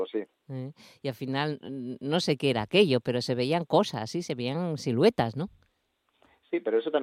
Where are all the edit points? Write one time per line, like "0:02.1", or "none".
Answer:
0:01.6